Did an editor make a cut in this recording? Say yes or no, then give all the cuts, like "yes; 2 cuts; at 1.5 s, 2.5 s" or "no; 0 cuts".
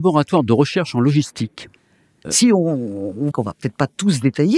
yes; 2 cuts; at 2.2 s, 3.3 s